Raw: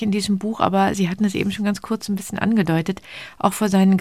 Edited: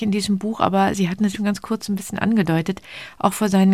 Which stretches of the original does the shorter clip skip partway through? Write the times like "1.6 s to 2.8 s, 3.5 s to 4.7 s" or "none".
1.3 s to 1.5 s